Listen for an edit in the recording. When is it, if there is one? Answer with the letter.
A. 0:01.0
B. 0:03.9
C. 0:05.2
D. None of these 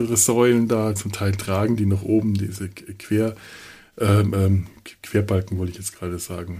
A